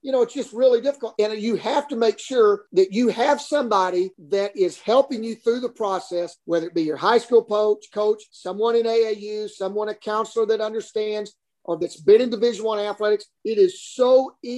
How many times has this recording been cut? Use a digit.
2